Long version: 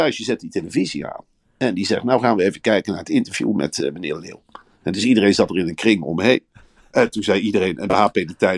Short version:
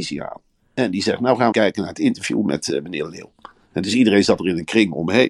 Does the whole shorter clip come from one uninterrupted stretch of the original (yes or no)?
no